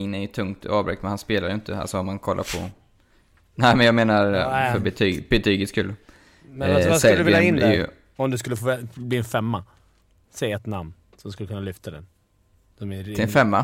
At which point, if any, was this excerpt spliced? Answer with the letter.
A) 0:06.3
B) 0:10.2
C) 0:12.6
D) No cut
D